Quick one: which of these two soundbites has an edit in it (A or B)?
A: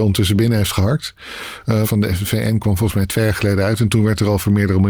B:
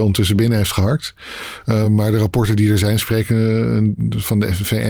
A